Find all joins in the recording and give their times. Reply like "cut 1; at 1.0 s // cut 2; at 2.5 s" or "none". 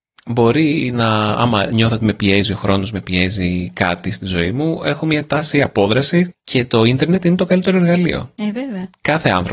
cut 1; at 6.3 s

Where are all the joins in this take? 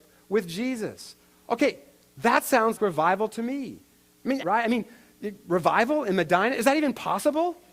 cut 1; at 2.8 s // cut 2; at 4.4 s

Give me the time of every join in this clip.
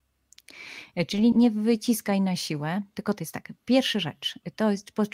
cut 1; at 1.3 s

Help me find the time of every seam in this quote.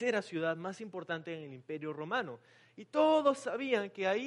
none

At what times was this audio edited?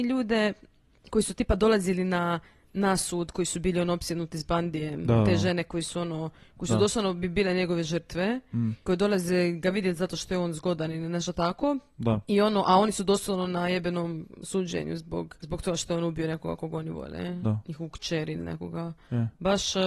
none

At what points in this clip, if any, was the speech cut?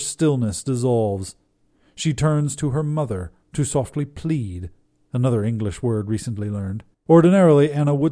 cut 1; at 6.9 s

